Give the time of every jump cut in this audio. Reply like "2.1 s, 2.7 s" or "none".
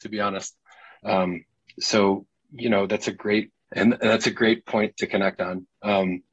1.0 s, 3.7 s